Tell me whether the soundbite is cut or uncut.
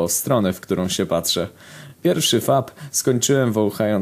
uncut